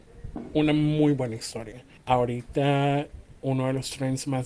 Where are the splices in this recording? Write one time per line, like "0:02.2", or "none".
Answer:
0:02.0